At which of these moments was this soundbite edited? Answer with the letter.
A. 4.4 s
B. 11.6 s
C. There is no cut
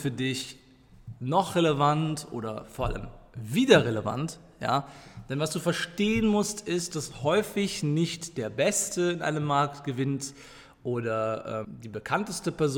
B